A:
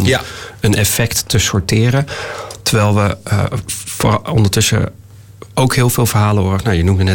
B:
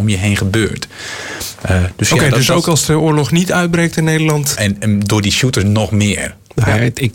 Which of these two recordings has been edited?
B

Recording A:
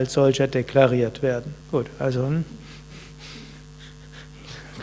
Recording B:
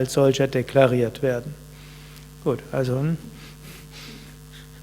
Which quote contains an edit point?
A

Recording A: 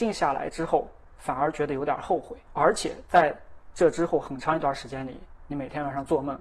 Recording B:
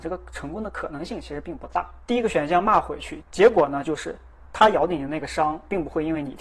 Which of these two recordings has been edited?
B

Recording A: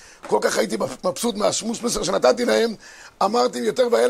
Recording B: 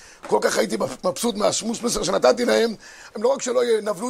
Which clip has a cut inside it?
B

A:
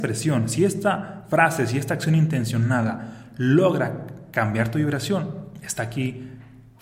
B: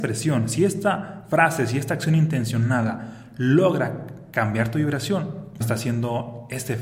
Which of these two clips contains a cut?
B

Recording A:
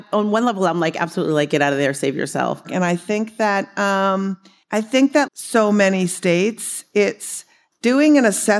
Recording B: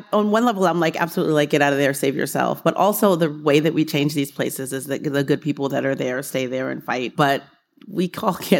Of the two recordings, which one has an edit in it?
A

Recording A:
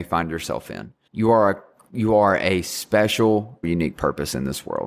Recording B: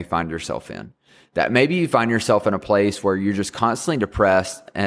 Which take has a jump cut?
A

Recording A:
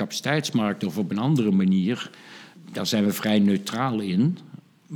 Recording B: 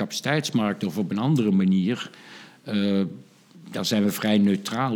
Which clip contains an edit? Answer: A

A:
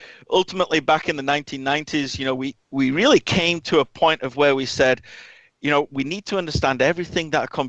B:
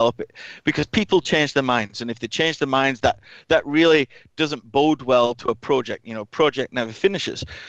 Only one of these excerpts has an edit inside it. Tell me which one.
A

